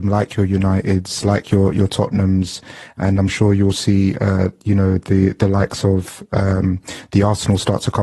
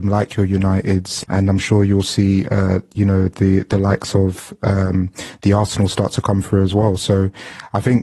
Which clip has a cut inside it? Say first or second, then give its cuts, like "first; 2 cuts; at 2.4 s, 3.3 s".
second; 1 cut; at 1.2 s